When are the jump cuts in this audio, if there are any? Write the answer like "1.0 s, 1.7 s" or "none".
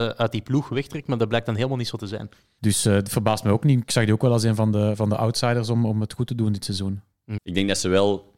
2.6 s, 7.4 s

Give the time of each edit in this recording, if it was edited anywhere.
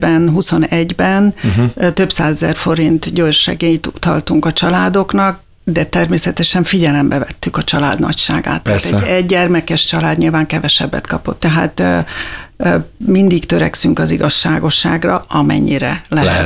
11.4 s

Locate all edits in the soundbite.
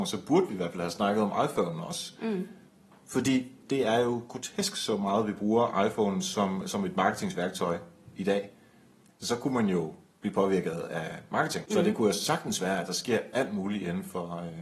9.1 s, 11.6 s

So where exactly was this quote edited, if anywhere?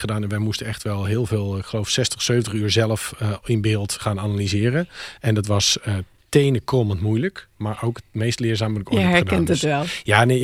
none

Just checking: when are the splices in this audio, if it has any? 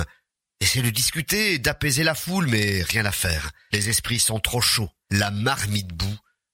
none

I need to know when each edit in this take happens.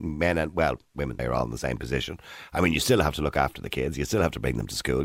1.2 s

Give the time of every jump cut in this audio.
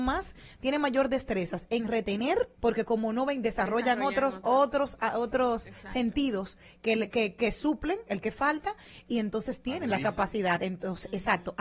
2.5 s

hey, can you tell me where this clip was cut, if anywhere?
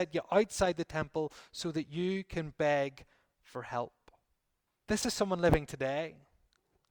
4.7 s

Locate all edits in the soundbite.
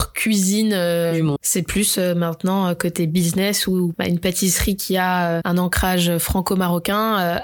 1.4 s, 3.9 s, 5.4 s

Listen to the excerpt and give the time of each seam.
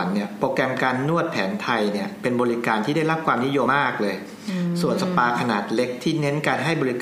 3.7 s

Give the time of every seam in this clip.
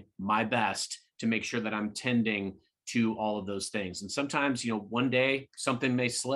none

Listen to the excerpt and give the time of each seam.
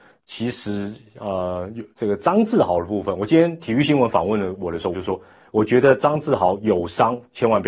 1.9 s, 4.9 s

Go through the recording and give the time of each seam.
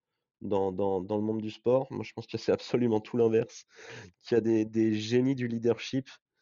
none

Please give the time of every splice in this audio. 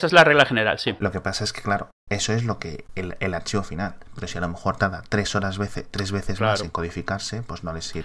none

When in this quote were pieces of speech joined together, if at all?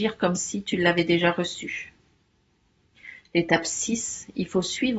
none

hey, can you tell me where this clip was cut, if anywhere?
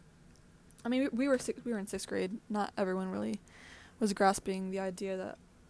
none

